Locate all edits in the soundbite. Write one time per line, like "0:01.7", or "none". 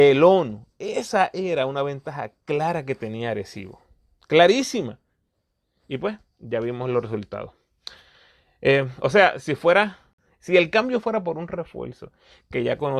none